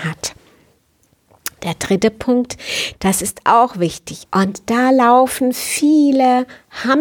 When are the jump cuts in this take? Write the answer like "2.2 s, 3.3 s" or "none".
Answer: 2.9 s, 4.3 s